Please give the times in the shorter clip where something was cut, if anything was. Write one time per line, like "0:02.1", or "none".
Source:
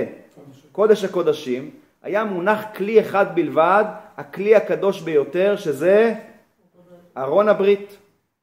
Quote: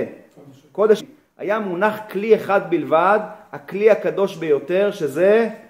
0:01.0